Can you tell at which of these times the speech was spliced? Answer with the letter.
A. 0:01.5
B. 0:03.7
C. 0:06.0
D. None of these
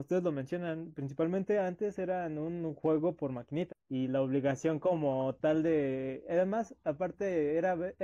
B